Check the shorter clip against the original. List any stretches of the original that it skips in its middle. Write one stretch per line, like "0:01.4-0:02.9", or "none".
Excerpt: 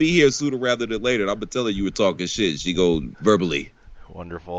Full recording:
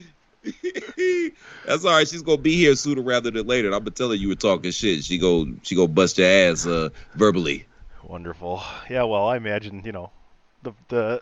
0:05.6-0:07.1